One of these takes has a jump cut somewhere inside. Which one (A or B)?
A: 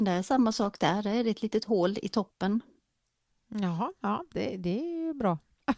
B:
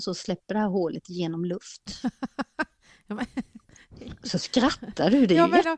A